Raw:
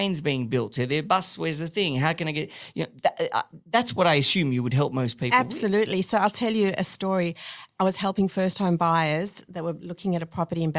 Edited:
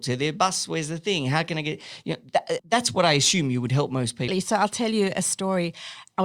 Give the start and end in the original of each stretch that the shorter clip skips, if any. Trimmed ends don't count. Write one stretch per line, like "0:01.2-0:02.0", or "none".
0:03.3-0:03.6
0:05.3-0:05.9